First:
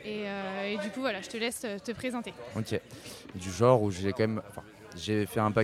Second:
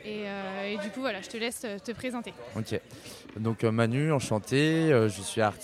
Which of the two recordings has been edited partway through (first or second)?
first